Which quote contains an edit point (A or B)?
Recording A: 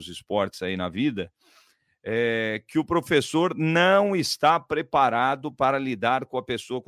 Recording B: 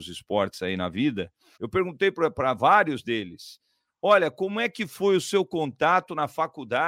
B